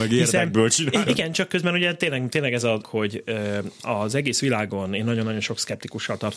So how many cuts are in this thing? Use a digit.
2